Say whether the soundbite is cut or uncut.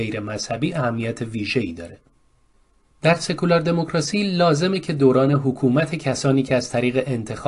uncut